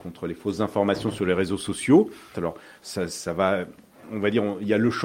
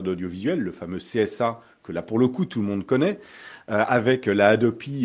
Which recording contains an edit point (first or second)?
first